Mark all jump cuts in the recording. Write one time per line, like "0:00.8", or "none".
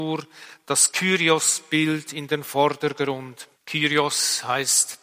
0:03.6